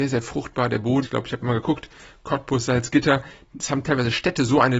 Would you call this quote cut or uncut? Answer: cut